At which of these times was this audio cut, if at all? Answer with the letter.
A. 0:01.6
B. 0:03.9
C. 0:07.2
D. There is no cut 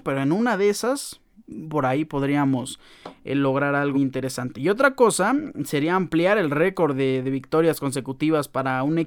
B